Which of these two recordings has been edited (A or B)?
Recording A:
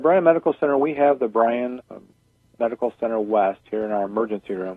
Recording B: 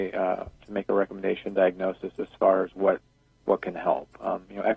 A